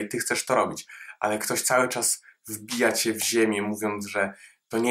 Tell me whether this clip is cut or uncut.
uncut